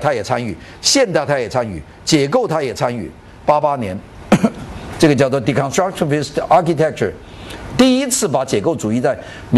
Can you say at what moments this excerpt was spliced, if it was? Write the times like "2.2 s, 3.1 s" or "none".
none